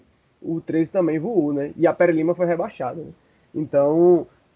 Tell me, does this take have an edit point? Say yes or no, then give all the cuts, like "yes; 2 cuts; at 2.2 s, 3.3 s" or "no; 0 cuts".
no; 0 cuts